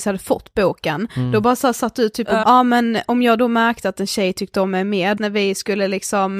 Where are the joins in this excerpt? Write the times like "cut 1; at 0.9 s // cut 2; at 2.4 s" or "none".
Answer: cut 1; at 2.4 s // cut 2; at 5.2 s